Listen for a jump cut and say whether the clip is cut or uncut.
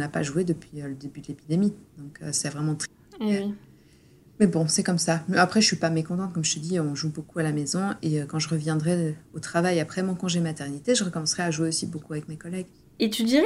uncut